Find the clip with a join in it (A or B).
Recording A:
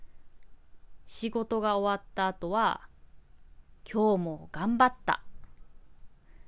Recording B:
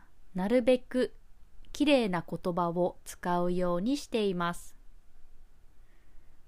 A